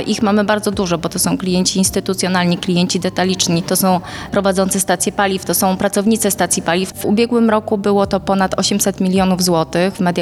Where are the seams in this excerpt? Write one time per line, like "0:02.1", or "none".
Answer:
0:06.9